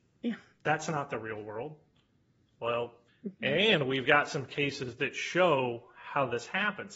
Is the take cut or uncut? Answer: cut